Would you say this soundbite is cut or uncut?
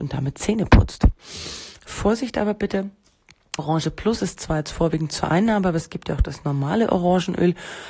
cut